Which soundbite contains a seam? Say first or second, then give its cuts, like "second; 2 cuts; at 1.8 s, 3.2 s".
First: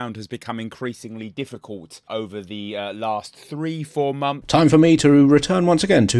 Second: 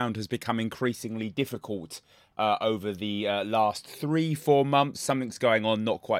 first; 2 cuts; at 2.1 s, 4.4 s